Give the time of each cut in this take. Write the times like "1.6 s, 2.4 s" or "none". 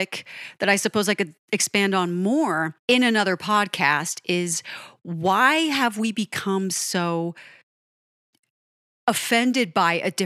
2.8 s